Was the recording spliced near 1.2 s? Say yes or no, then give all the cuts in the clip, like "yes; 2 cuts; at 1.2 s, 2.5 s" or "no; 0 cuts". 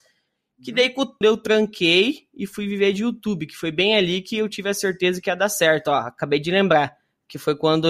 yes; 1 cut; at 1.2 s